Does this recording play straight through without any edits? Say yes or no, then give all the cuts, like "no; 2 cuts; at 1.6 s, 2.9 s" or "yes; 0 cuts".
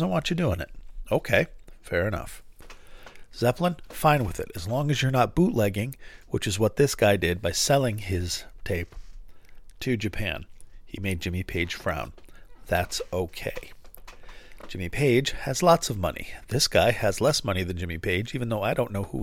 yes; 0 cuts